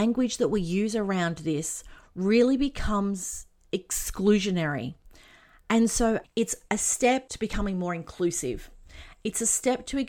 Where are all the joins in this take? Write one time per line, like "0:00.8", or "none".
0:06.2